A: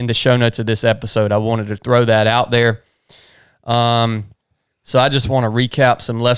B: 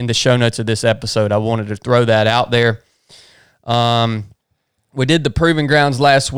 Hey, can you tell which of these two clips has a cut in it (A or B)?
A